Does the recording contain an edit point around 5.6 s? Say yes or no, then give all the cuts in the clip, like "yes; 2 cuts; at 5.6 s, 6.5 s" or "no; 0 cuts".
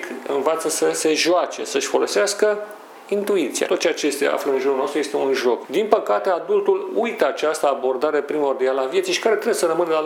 yes; 2 cuts; at 3.7 s, 5.6 s